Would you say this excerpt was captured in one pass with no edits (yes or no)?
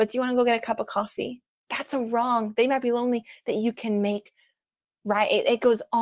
yes